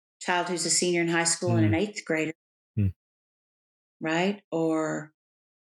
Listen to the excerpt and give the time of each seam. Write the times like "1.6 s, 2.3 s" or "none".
none